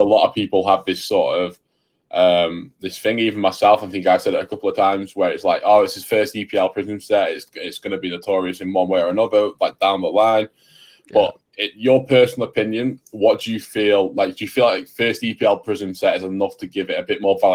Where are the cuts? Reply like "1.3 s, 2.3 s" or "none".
none

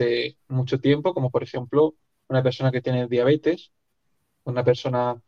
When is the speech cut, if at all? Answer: none

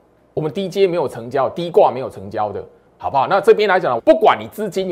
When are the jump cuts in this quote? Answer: 2.9 s, 4.0 s

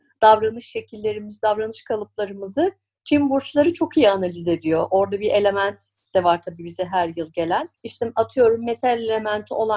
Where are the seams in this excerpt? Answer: 7.7 s

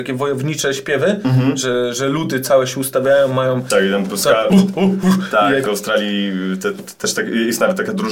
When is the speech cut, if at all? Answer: 5.7 s

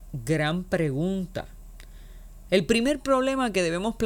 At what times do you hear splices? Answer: 2.5 s

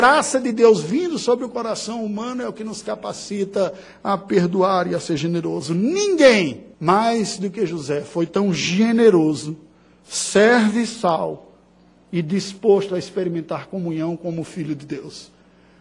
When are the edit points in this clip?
6.7 s

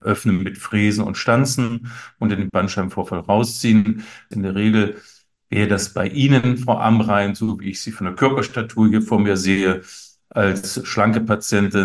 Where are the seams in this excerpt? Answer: 4.3 s

